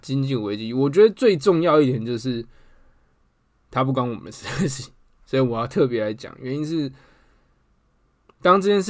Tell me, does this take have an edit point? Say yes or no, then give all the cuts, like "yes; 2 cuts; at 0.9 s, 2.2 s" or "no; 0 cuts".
no; 0 cuts